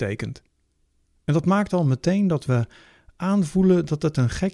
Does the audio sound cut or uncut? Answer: uncut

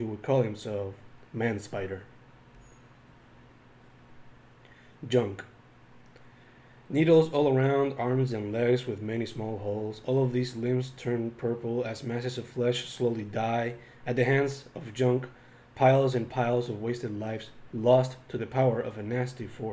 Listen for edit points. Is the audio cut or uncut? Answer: uncut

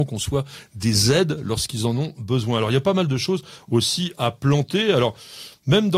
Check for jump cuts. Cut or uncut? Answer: cut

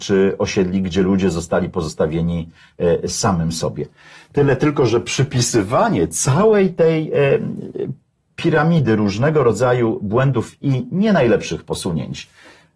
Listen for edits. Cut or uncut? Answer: uncut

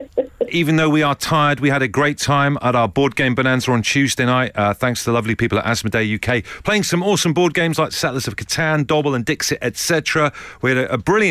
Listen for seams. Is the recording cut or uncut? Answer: uncut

